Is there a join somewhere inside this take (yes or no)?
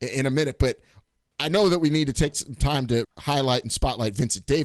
yes